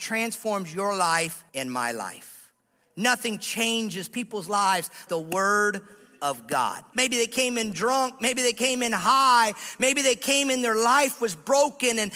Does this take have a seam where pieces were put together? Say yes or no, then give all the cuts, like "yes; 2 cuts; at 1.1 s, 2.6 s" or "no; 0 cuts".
yes; 3 cuts; at 1.5 s, 5.1 s, 6.9 s